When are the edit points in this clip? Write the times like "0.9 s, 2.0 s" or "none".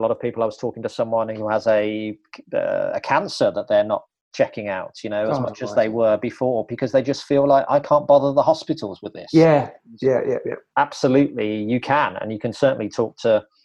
none